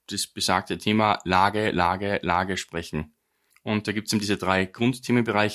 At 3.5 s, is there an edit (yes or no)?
yes